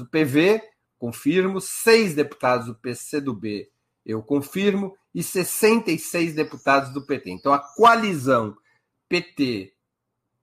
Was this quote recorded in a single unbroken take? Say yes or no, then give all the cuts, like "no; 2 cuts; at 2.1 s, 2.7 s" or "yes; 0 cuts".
yes; 0 cuts